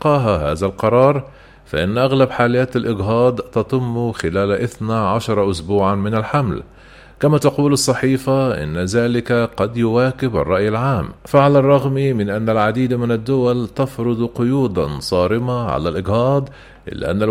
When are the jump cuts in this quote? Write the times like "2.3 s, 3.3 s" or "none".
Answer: 11.2 s